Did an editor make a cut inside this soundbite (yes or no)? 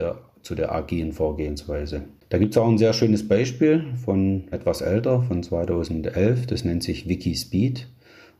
yes